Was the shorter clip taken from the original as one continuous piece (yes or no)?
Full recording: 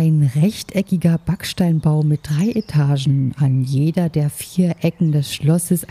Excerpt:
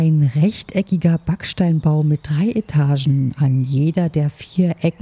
yes